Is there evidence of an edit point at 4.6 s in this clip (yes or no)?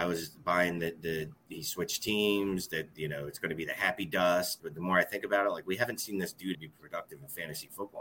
yes